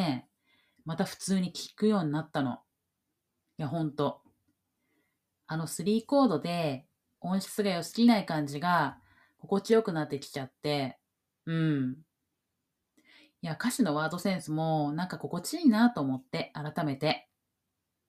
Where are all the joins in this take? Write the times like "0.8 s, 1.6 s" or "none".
none